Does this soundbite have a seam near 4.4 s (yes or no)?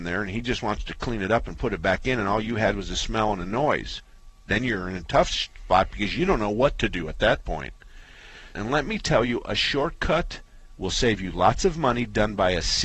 no